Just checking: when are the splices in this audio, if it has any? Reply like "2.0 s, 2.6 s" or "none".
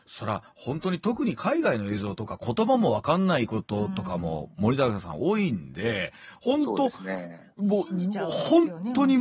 none